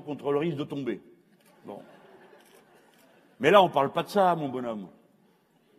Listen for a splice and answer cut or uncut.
uncut